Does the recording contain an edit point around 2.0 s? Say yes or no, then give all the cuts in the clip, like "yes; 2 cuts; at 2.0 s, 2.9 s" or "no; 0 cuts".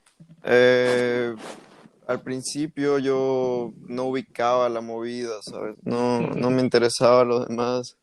no; 1 cut; at 5.7 s